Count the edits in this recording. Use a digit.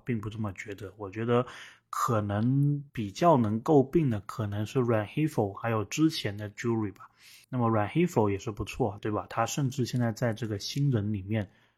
3